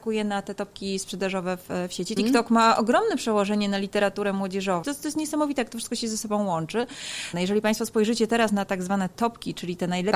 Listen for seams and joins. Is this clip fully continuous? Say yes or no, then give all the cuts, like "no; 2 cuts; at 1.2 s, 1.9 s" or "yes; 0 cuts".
no; 3 cuts; at 2.2 s, 4.8 s, 7.3 s